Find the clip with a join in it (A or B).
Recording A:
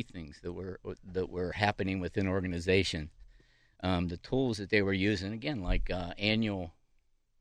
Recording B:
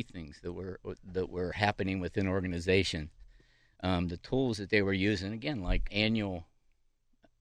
B